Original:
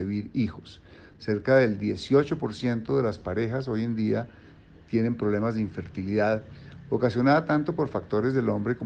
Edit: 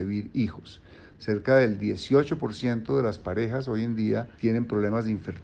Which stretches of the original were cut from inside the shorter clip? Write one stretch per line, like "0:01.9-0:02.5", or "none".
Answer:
0:04.4-0:04.9